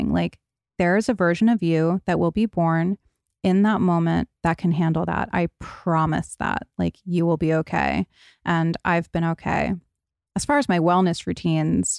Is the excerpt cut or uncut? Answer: uncut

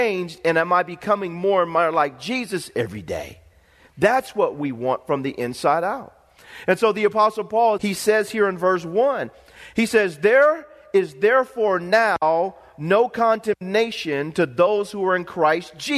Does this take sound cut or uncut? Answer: cut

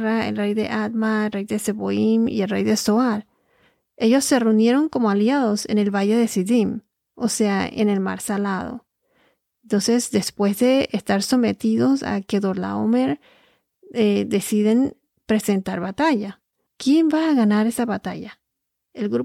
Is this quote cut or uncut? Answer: cut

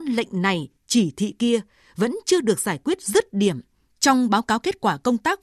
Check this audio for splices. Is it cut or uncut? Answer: cut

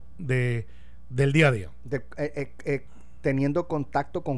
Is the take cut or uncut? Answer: uncut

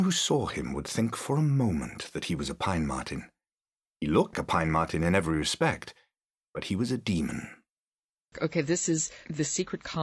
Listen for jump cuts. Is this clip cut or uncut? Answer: cut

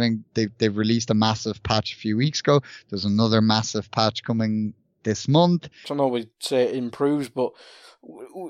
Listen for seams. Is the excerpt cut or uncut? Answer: cut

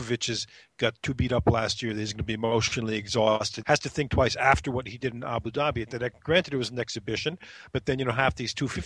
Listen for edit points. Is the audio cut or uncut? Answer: cut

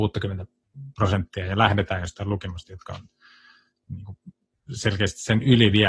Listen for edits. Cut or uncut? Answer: uncut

